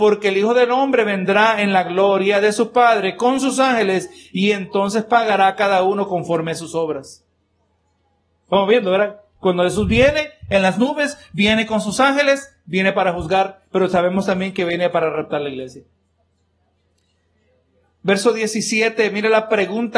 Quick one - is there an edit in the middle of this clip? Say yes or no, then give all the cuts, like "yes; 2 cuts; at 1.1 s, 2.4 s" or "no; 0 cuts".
no; 0 cuts